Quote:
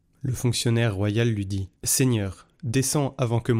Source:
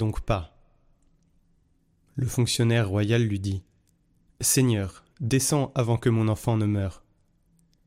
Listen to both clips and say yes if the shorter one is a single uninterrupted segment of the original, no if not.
no